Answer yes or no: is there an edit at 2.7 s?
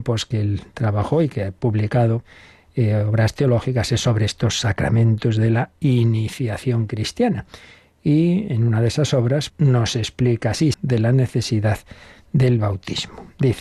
no